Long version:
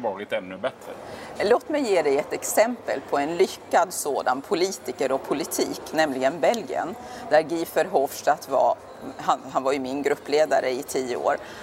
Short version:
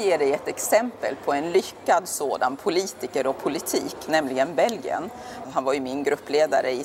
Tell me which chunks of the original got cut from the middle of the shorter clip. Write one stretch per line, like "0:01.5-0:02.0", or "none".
0:07.3-0:09.4